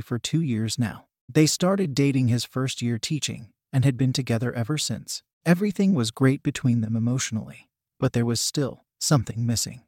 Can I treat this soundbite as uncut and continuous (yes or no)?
no